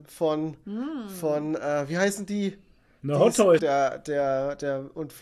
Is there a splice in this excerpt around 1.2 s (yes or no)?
no